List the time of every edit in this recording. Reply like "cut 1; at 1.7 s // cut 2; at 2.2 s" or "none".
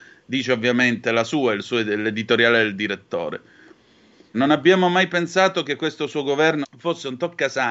cut 1; at 4.3 s // cut 2; at 6.6 s